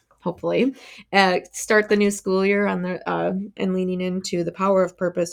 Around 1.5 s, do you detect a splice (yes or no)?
no